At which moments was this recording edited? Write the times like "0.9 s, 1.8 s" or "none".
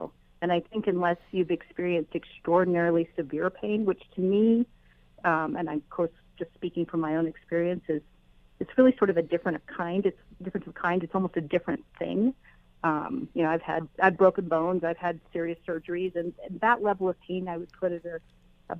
none